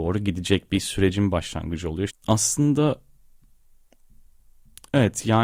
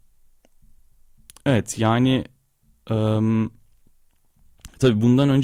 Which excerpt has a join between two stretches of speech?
first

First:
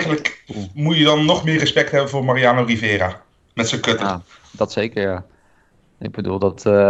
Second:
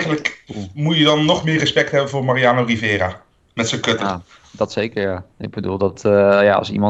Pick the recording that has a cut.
second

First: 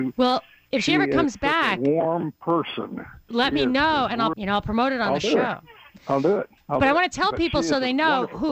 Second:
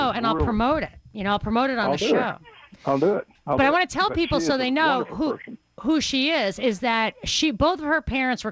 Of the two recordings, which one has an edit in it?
first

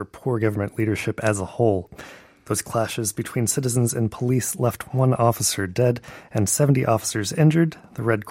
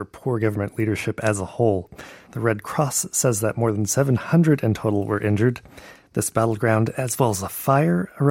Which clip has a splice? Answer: second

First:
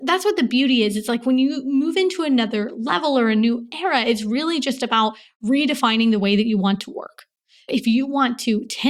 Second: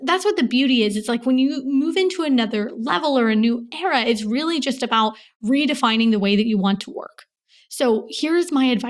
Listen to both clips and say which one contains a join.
first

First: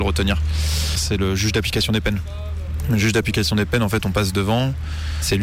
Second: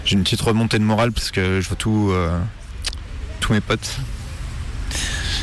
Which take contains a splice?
first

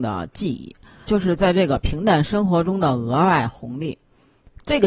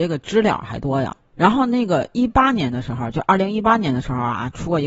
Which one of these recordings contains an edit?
first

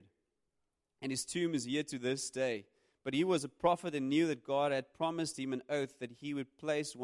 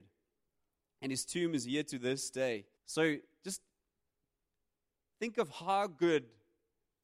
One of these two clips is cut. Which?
second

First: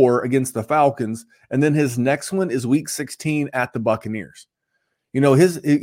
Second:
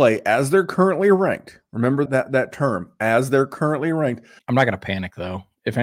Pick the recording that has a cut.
second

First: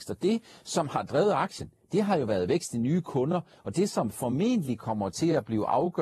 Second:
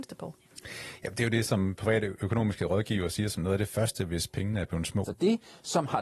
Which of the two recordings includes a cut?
second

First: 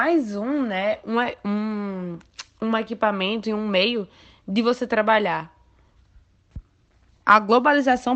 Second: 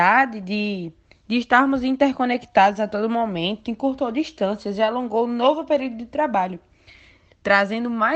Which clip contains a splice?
first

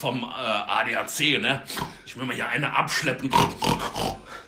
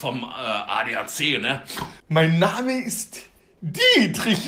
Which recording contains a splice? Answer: second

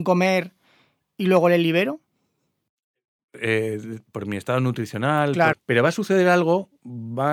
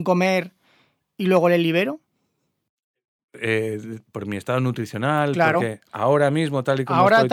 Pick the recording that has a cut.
first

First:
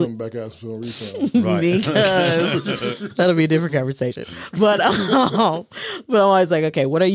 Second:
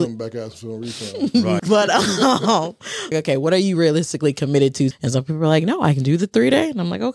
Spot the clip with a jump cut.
second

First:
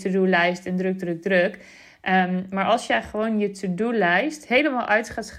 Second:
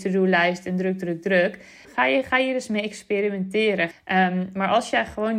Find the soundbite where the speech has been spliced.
second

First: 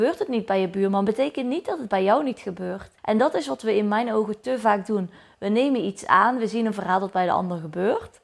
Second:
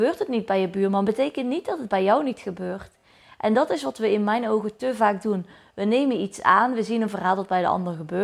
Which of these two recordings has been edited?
first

